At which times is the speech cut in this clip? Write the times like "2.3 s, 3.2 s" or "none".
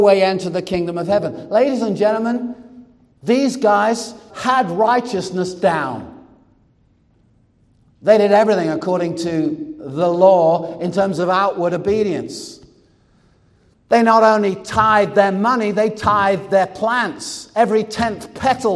4.3 s